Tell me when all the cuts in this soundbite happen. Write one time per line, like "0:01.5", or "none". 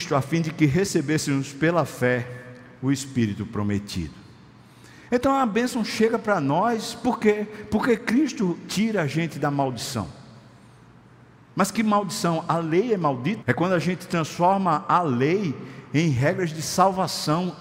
0:13.4